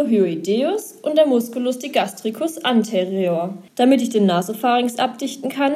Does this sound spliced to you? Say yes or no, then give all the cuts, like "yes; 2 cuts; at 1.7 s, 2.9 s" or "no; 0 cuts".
yes; 1 cut; at 3.7 s